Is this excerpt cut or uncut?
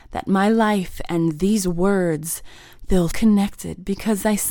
cut